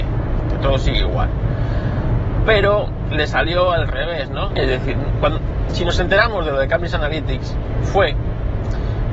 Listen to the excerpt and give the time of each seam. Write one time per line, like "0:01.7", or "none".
0:04.5